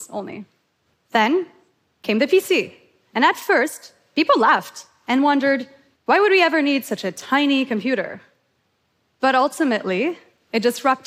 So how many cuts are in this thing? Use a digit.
0